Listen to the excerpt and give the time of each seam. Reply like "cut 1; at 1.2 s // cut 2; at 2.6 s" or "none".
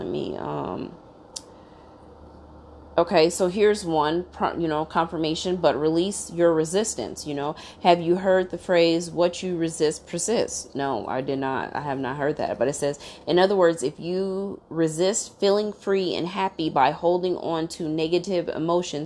none